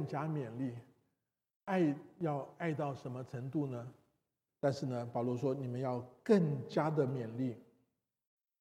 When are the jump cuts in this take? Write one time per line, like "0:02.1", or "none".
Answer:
0:04.5